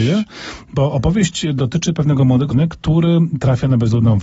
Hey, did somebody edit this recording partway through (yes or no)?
yes